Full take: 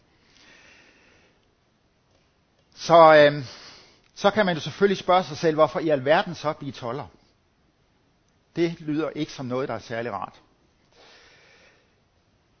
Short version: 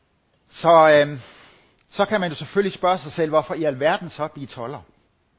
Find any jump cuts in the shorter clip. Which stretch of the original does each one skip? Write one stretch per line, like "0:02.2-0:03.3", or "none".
none